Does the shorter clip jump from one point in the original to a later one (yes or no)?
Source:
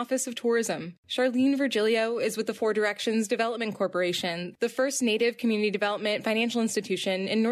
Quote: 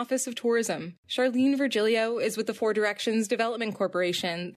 no